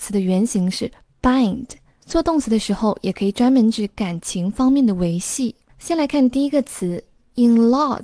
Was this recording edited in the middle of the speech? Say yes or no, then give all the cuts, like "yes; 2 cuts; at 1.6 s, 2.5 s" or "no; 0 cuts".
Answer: yes; 2 cuts; at 2.0 s, 5.7 s